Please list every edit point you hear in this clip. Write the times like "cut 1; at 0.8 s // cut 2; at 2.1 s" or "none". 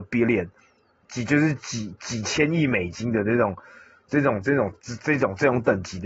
cut 1; at 2.0 s

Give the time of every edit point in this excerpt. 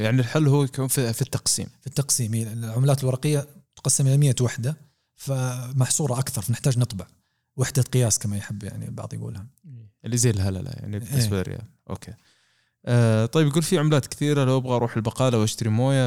none

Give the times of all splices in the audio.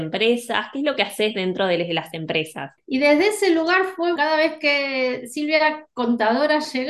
cut 1; at 2.8 s // cut 2; at 4.2 s

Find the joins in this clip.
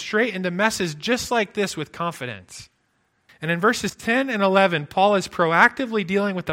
cut 1; at 3.3 s

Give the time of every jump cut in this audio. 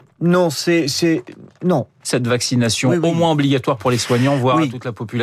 cut 1; at 2.0 s

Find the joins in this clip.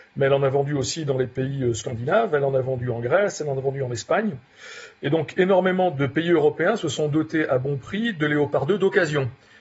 none

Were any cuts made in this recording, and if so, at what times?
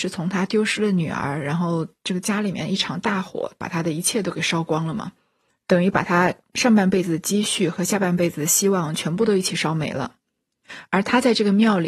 none

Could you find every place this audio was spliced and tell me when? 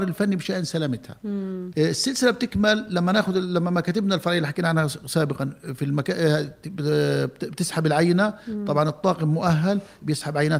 cut 1; at 1.7 s

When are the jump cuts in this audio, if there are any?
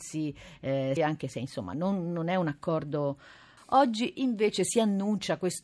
cut 1; at 1.0 s // cut 2; at 3.6 s

